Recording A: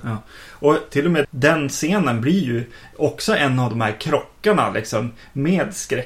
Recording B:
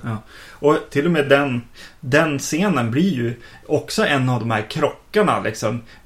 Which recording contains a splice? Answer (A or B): A